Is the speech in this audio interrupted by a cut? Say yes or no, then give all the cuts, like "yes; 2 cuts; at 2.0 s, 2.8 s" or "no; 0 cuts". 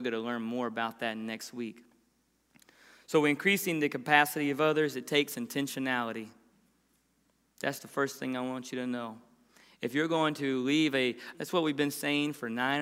yes; 1 cut; at 11.3 s